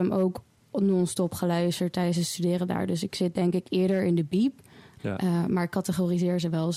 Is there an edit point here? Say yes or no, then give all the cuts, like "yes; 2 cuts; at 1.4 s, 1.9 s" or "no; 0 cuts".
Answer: yes; 1 cut; at 5.0 s